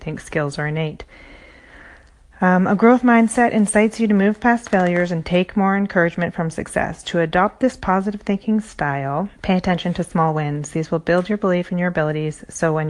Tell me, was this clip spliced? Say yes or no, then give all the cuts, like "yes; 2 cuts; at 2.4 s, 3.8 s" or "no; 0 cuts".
yes; 1 cut; at 9.4 s